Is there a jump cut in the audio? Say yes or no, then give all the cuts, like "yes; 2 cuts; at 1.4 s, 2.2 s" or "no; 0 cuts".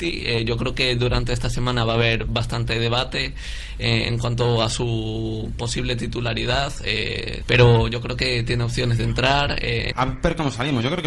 yes; 2 cuts; at 7.4 s, 9.9 s